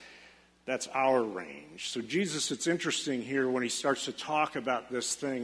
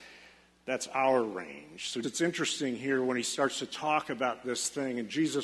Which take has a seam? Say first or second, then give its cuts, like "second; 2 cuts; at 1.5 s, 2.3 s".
second; 1 cut; at 2.0 s